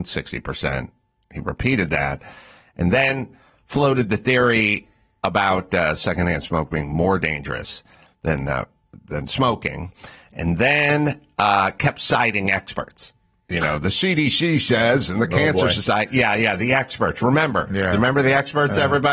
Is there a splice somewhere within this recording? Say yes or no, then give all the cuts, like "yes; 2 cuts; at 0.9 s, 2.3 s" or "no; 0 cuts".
no; 0 cuts